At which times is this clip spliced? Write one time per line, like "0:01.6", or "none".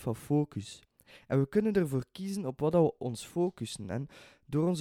none

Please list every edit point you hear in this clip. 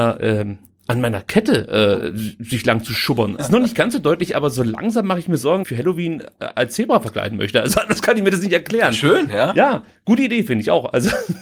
0:03.4
0:05.6

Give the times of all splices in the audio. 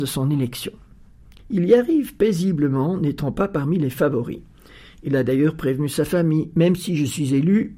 0:01.4

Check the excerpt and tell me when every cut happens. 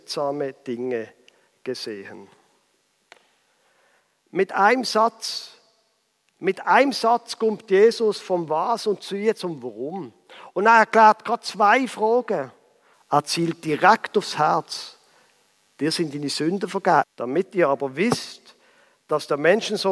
0:12.9
0:17.0

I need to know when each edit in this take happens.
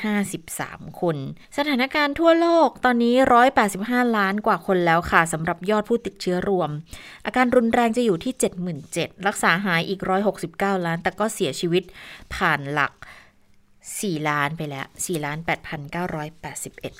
0:01.4

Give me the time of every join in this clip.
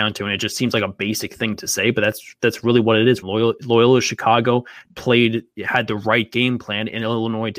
0:03.2
0:04.9

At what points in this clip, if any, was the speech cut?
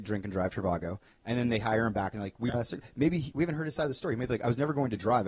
0:02.5

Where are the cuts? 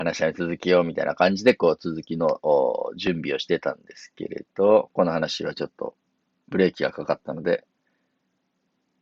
0:05.0

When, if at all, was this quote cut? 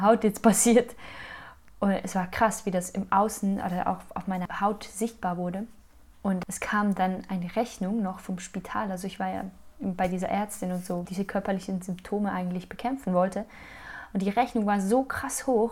0:11.0

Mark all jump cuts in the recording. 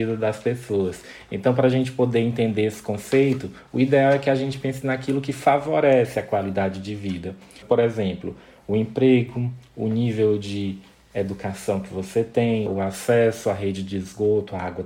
0:07.6
0:12.7

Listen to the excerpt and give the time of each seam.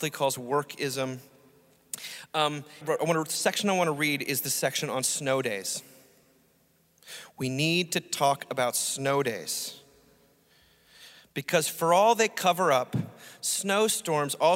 0:02.8

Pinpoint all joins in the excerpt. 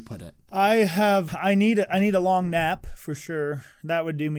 0:01.3

